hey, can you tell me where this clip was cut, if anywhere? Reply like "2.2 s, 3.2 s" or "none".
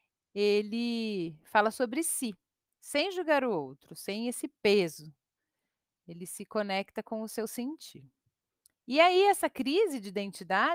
none